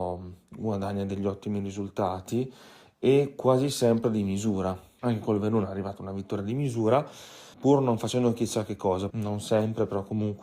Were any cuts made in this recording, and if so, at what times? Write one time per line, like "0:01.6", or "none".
0:05.0
0:07.5
0:09.1